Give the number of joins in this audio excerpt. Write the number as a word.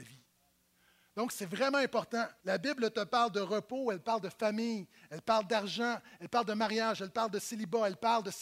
one